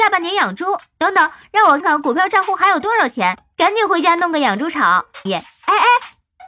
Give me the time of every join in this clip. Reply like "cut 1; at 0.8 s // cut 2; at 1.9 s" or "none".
cut 1; at 1.8 s // cut 2; at 3.5 s // cut 3; at 5.3 s